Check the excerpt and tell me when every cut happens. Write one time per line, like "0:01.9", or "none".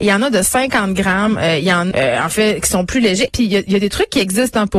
0:01.9
0:03.3